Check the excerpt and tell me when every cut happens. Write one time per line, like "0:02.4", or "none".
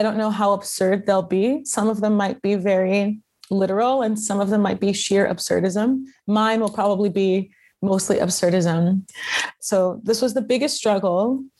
0:09.6